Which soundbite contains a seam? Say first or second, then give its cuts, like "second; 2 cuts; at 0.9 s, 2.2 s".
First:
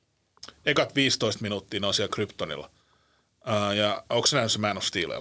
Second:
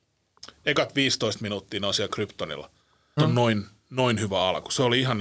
second; 1 cut; at 3.2 s